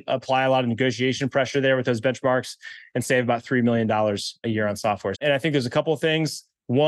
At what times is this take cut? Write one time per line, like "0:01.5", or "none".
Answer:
0:05.1